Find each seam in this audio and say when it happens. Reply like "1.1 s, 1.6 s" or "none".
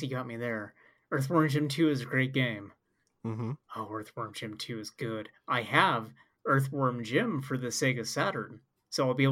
3.6 s